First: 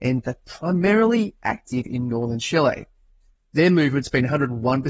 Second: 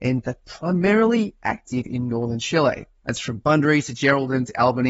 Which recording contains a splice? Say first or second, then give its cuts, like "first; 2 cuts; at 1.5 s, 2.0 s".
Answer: second; 1 cut; at 3.0 s